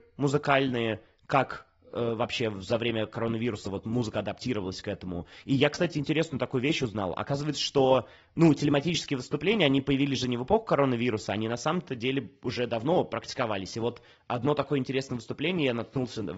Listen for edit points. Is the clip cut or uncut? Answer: uncut